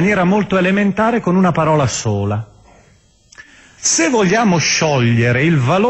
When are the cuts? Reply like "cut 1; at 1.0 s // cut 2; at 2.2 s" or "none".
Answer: cut 1; at 3.8 s